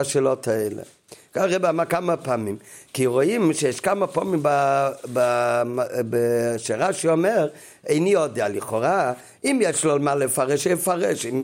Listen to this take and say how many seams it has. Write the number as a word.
zero